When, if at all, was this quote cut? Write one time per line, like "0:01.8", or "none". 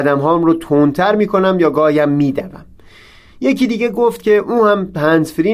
none